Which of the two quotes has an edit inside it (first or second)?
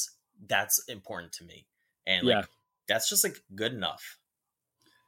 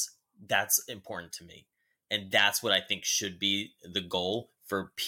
first